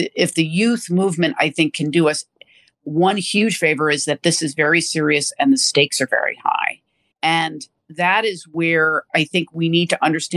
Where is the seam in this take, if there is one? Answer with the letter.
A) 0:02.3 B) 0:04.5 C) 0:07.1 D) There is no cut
C